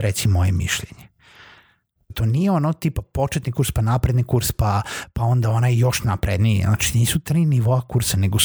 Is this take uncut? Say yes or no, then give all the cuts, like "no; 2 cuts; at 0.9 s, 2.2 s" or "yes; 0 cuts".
no; 1 cut; at 2.1 s